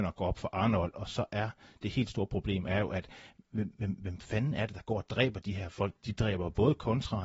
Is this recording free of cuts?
yes; 0 cuts

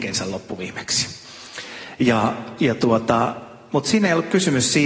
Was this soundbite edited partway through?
no; 0 cuts

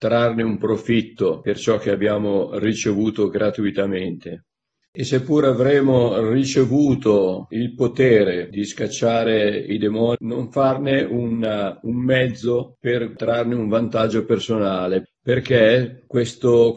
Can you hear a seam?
yes; 3 cuts; at 4.8 s, 10.2 s, 15.1 s

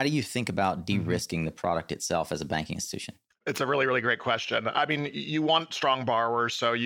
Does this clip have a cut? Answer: no; 0 cuts

